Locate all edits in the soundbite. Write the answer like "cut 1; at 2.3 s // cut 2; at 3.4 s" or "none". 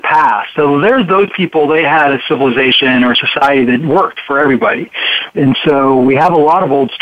cut 1; at 5.3 s

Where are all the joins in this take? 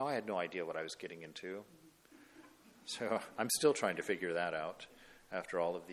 none

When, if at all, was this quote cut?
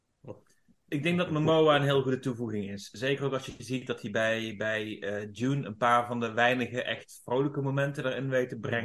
none

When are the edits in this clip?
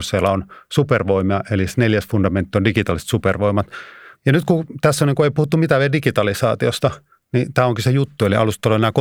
cut 1; at 4.1 s

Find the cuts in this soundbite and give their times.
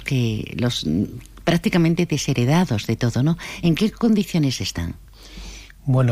none

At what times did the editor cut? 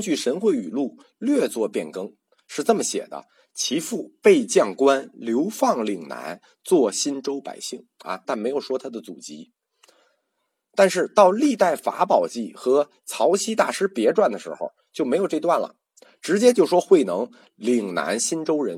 cut 1; at 8.2 s

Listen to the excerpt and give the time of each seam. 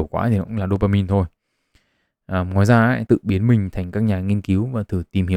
cut 1; at 3.1 s

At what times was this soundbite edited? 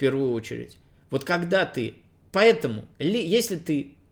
cut 1; at 2.9 s

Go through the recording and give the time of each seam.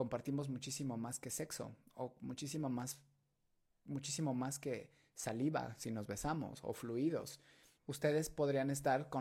cut 1; at 7.8 s

